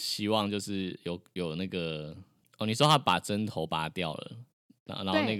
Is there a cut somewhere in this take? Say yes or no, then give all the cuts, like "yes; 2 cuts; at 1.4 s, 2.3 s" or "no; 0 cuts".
yes; 1 cut; at 2.4 s